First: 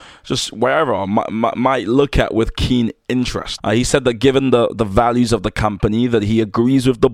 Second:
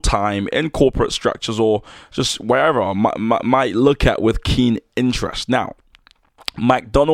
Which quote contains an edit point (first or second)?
first